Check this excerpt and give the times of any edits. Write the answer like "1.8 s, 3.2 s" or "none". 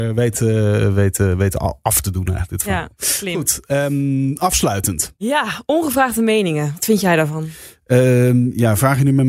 none